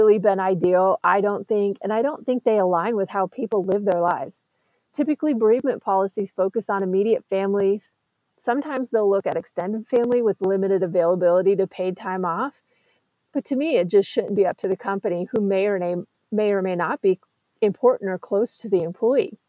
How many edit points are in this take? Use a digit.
0